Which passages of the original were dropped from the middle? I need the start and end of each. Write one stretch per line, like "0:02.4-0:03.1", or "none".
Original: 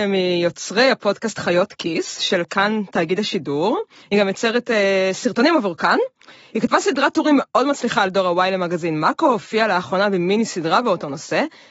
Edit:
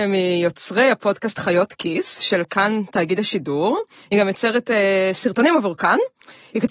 none